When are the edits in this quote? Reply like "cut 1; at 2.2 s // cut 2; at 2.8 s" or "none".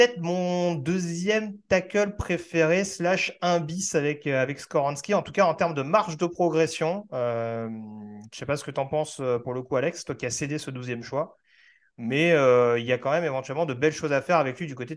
none